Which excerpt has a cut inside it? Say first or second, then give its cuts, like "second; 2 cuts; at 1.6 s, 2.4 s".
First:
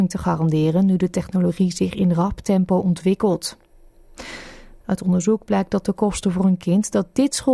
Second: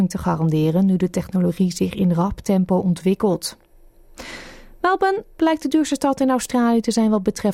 first; 1 cut; at 4.8 s